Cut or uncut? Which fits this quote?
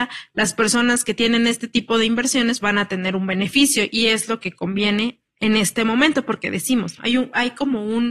cut